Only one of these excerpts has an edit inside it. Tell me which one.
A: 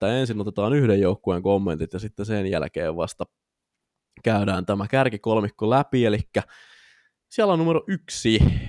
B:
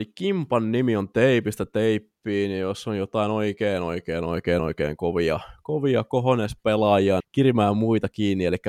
B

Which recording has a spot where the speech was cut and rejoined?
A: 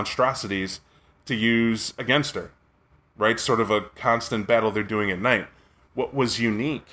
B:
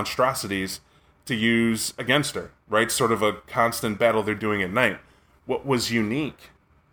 B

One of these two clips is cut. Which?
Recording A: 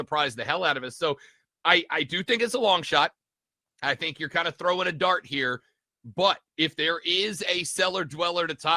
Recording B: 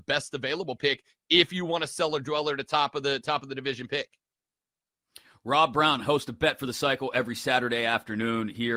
A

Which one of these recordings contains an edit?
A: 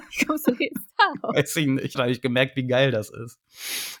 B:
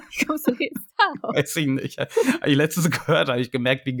A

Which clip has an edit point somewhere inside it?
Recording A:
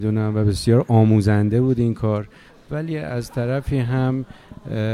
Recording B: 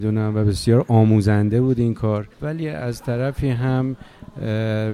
B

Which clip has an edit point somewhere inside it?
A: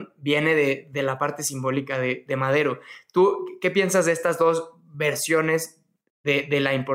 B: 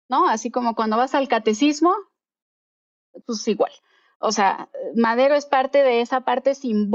B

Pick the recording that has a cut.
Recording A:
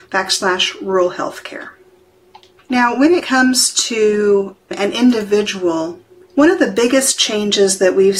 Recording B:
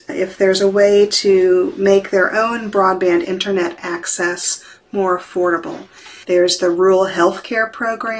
B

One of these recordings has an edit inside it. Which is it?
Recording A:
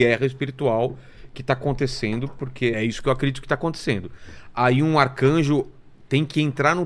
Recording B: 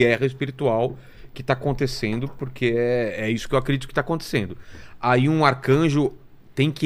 A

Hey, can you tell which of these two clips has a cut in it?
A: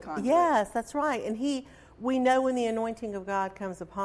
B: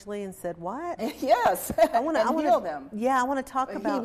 B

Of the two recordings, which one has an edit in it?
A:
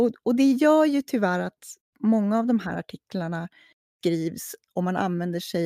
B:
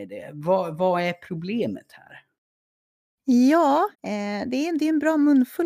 B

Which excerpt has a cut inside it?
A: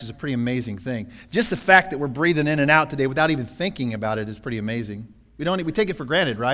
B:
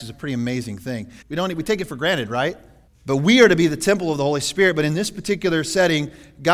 B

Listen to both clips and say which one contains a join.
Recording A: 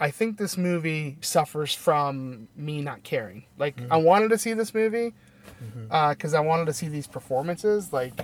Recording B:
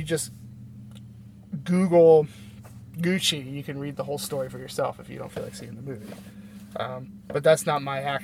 A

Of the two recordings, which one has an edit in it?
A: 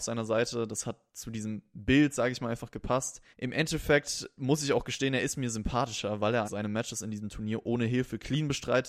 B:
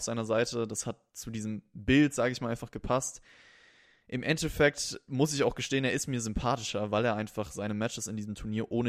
A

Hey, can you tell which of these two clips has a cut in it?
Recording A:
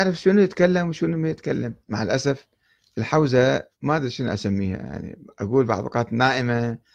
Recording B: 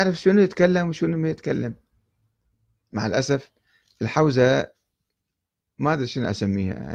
A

